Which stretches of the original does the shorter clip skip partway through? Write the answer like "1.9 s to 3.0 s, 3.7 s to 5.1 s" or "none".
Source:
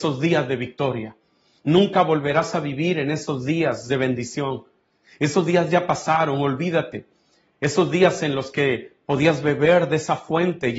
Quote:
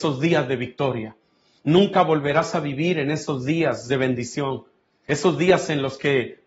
5.0 s to 7.6 s